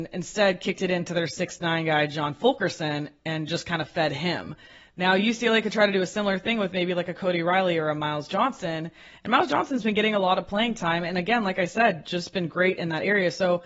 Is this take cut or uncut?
uncut